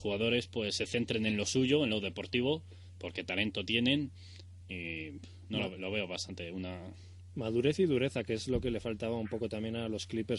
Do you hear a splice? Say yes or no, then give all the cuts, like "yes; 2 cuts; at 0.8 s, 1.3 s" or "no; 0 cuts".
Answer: no; 0 cuts